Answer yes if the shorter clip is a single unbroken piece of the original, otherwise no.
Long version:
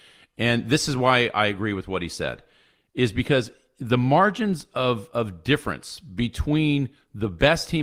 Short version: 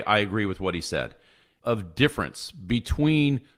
no